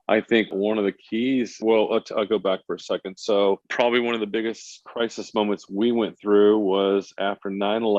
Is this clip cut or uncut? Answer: uncut